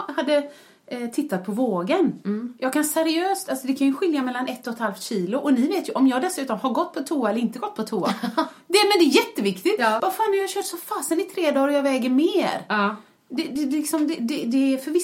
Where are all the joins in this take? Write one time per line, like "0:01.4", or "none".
0:10.0